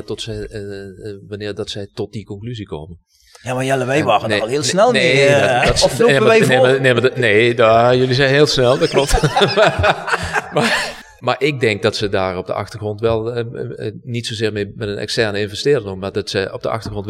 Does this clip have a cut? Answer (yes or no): no